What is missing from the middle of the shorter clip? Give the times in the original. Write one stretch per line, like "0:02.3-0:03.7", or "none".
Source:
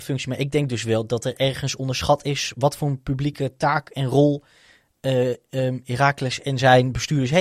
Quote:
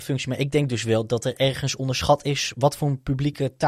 none